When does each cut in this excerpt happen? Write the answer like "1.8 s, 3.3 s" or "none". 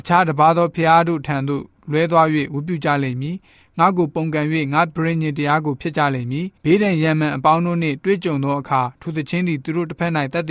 6.6 s